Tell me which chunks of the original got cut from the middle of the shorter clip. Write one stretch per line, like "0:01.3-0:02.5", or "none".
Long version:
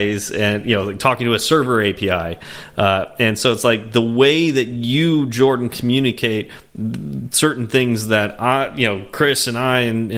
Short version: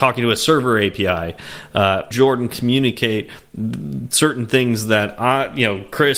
0:03.1-0:05.3